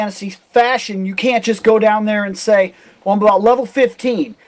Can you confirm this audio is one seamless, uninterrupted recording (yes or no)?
yes